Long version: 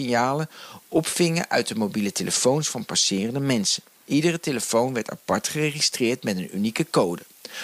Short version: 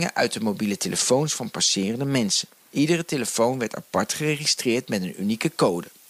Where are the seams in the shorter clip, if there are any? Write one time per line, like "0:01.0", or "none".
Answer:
none